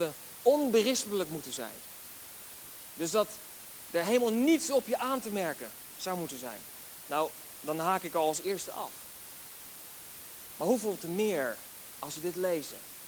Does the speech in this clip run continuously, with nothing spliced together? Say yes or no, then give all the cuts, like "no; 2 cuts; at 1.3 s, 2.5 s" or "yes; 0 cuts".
yes; 0 cuts